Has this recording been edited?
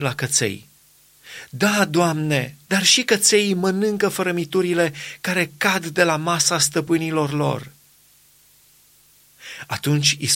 yes; 1 cut; at 2.7 s

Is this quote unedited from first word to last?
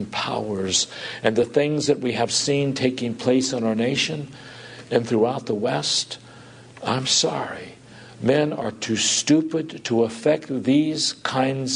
yes; 0 cuts

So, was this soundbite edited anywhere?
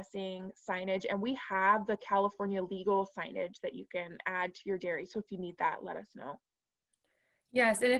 no; 0 cuts

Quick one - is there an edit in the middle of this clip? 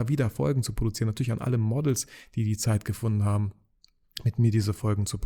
no; 0 cuts

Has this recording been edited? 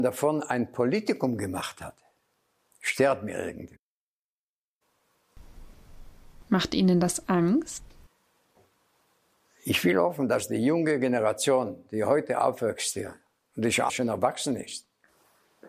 yes; 1 cut; at 13.9 s

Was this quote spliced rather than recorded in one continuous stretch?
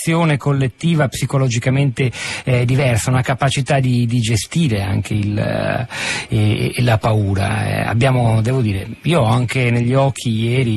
no; 0 cuts

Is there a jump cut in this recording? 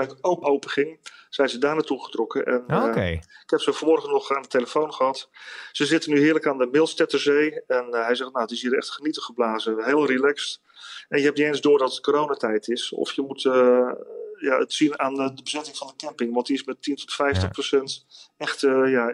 no; 0 cuts

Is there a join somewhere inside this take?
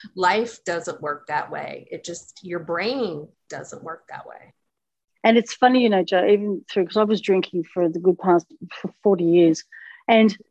no; 0 cuts

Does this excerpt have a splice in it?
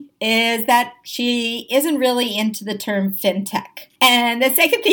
yes; 1 cut; at 3.9 s

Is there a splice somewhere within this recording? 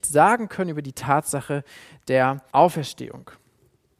yes; 1 cut; at 2.5 s

